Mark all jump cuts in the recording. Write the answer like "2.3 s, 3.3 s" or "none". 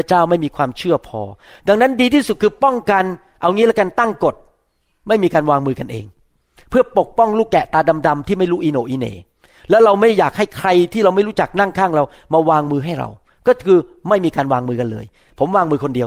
none